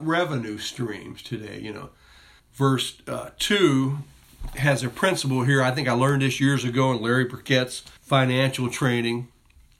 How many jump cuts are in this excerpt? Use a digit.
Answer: 2